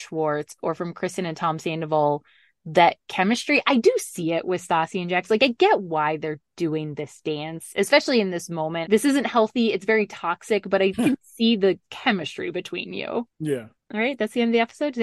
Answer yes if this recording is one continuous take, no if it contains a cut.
no